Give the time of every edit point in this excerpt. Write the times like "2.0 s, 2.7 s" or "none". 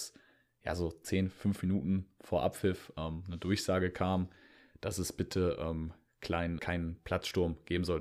6.6 s